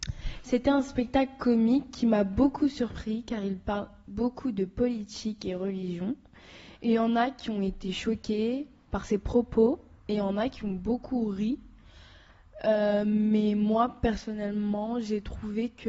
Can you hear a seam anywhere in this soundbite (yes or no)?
no